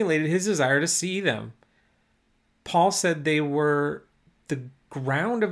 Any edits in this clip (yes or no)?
no